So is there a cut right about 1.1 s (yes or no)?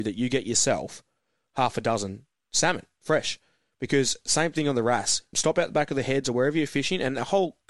no